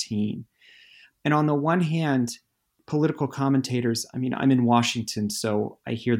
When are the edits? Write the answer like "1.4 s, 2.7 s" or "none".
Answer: none